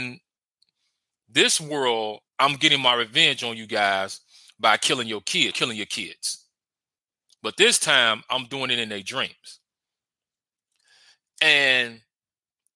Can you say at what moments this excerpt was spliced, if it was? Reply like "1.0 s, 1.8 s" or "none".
2.3 s, 5.5 s